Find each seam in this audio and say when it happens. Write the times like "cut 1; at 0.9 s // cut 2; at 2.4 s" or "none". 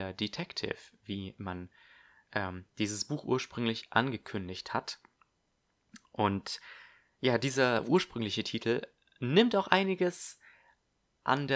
none

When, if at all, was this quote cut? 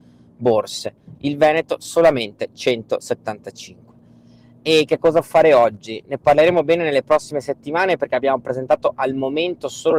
cut 1; at 1.1 s

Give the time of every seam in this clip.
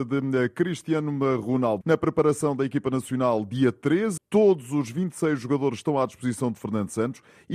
cut 1; at 1.8 s // cut 2; at 4.2 s

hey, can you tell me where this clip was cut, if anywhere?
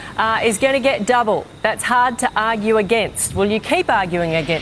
none

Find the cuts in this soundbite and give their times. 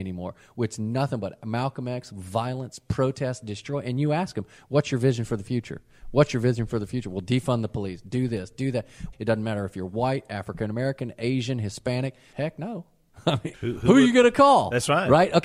cut 1; at 9.1 s // cut 2; at 12.3 s // cut 3; at 13.5 s

